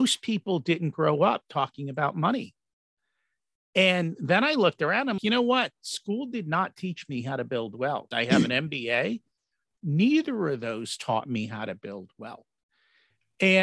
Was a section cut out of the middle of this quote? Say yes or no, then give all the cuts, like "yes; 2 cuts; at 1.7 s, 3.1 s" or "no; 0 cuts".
yes; 2 cuts; at 5.2 s, 8.1 s